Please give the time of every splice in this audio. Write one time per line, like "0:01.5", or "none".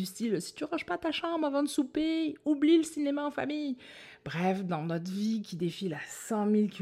none